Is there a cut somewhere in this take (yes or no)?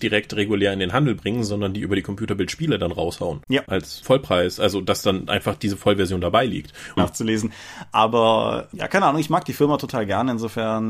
yes